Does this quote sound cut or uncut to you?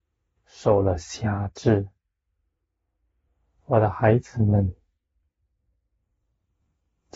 uncut